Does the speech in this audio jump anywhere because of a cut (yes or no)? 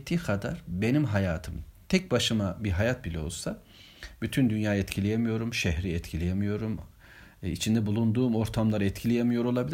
no